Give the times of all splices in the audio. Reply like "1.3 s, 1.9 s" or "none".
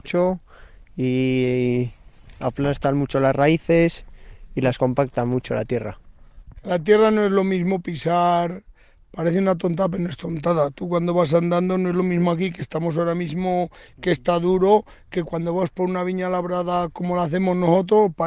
none